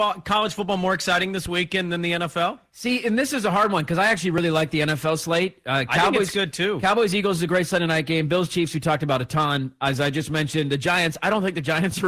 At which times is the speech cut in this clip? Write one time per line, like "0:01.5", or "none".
none